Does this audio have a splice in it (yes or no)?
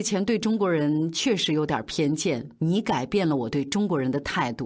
no